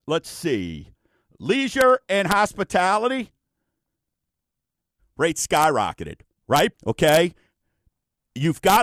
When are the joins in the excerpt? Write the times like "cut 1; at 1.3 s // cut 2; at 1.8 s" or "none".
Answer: cut 1; at 5.0 s // cut 2; at 6.7 s